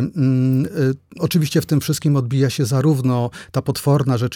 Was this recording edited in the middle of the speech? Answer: no; 0 cuts

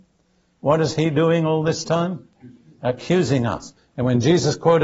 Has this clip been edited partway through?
yes; 1 cut; at 3.8 s

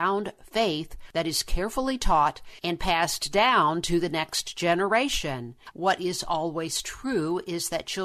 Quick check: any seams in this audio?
yes; 1 cut; at 5.7 s

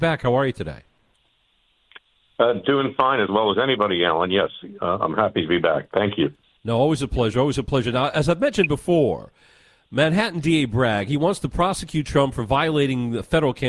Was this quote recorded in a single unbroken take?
yes; 0 cuts

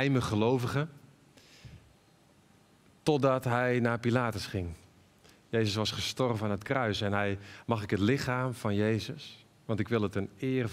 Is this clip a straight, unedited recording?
no; 1 cut; at 7.6 s

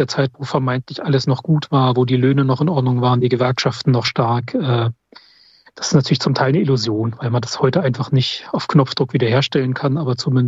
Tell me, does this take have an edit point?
no; 0 cuts

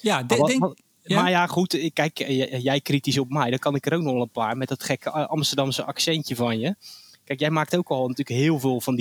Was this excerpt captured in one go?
yes; 0 cuts

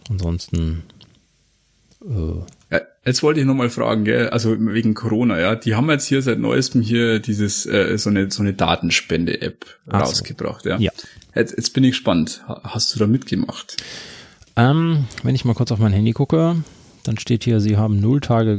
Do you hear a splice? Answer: no; 0 cuts

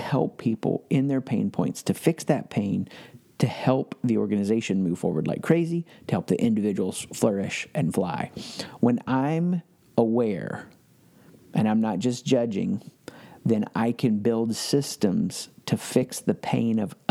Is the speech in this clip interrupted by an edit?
yes; 1 cut; at 8.8 s

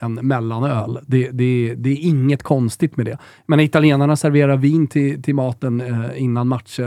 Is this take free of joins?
yes; 0 cuts

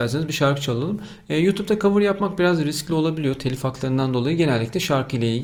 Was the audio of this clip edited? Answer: no; 0 cuts

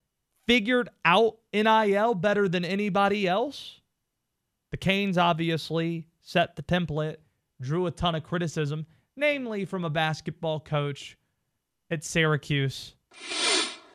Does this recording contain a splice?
yes; 1 cut; at 4.6 s

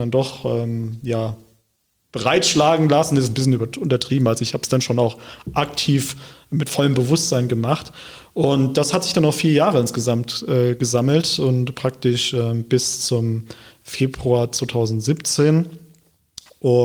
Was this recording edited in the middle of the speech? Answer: no; 0 cuts

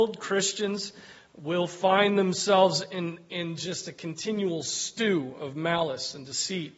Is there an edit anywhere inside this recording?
no; 0 cuts

